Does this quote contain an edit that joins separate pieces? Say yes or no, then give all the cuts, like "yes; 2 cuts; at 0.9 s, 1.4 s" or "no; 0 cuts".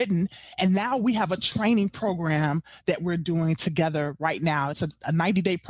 no; 0 cuts